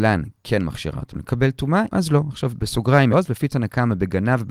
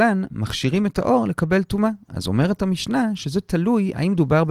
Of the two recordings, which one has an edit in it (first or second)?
first